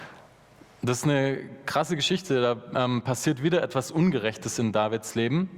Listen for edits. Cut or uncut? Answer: uncut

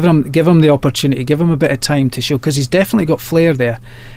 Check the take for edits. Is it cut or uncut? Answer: uncut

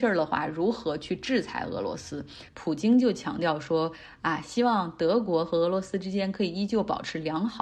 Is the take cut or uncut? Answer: cut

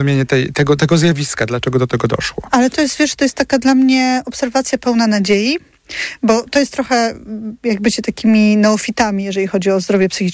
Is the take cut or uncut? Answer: uncut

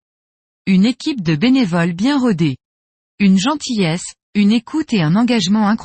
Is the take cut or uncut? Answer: uncut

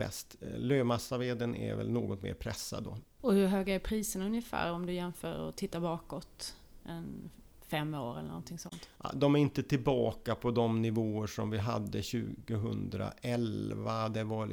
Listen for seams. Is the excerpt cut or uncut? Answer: cut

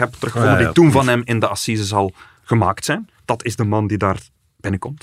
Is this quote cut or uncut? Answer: uncut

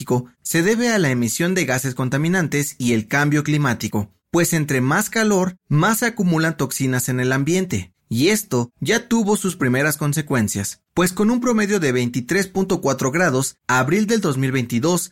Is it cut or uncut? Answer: uncut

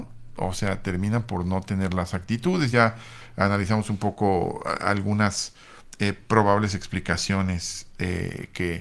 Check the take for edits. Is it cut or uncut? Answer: uncut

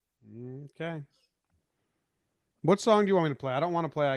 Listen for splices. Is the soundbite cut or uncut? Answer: uncut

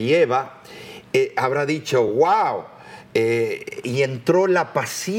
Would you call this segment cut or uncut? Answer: uncut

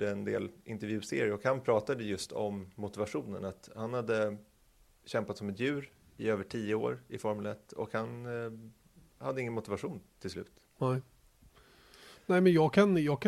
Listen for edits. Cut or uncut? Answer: uncut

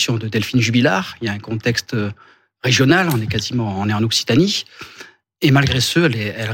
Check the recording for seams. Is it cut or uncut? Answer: uncut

